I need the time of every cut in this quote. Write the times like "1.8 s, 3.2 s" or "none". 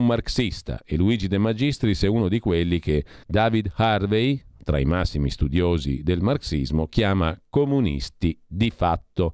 3.2 s

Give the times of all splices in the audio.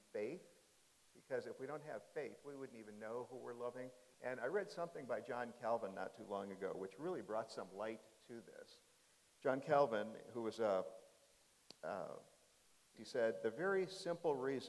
4.1 s, 13.0 s

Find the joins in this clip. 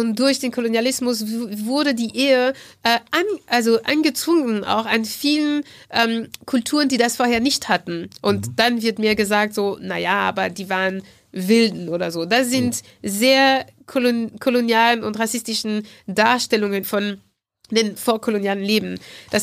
16.8 s, 18.0 s

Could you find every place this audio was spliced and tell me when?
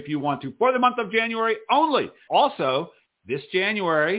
2.3 s

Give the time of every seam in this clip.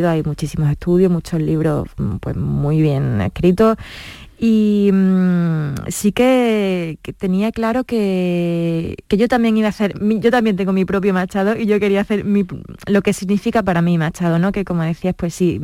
9.1 s

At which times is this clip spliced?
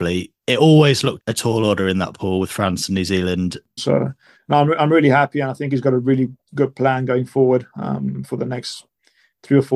1.2 s, 3.8 s

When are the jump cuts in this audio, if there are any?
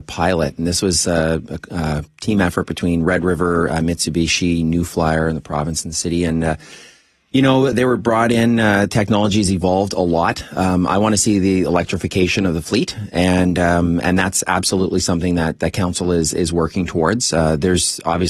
7.7 s

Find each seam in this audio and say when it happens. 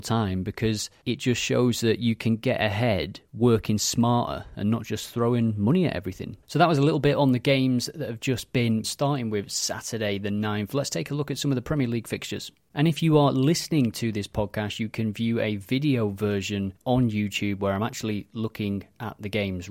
6.4 s, 8.8 s, 16.8 s

